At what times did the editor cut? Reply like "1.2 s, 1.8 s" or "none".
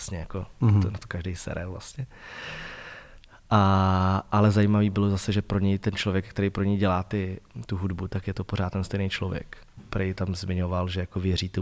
9.8 s